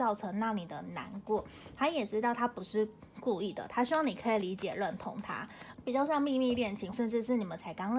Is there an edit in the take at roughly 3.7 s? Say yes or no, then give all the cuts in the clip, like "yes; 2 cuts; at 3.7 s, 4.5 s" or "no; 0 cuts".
no; 2 cuts; at 5.7 s, 6.9 s